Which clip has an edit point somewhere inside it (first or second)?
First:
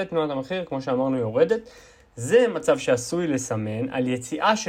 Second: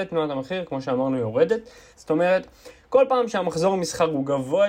second